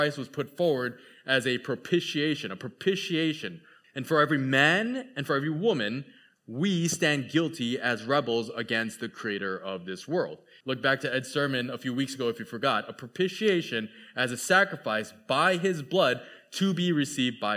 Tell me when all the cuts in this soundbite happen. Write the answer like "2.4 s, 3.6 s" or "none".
3.8 s, 10.6 s